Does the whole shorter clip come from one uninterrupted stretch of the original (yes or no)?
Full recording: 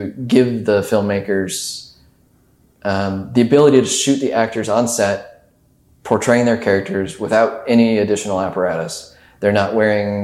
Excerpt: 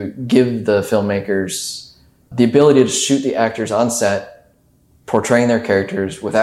no